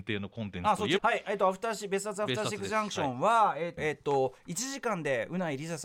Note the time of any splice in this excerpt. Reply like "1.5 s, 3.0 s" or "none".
1.0 s, 3.8 s